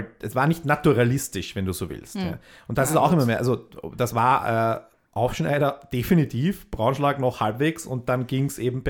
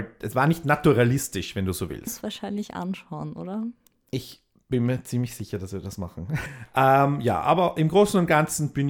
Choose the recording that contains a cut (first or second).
second